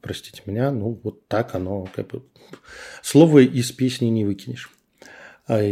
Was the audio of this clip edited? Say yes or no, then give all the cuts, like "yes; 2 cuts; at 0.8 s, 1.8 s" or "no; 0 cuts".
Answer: no; 0 cuts